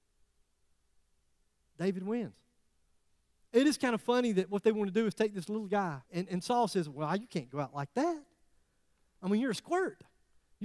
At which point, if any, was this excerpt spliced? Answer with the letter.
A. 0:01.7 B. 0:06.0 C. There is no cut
B